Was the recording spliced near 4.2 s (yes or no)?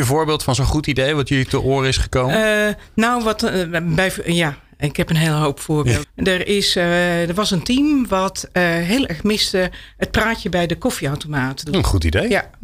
no